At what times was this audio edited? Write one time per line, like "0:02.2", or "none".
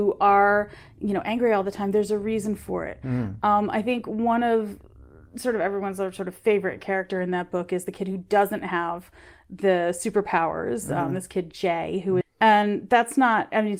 0:12.2